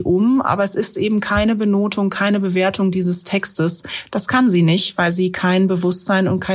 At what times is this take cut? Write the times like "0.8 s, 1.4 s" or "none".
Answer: none